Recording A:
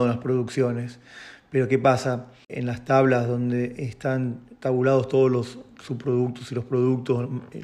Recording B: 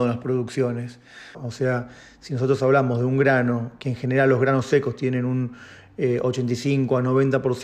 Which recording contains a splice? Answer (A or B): B